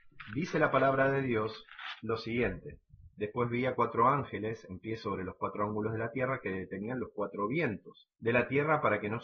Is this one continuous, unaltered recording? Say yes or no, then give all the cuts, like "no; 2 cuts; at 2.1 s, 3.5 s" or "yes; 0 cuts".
yes; 0 cuts